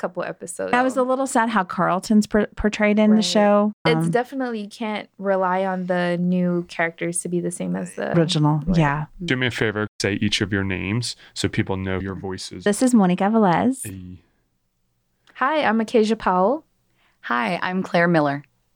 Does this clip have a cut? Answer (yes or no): no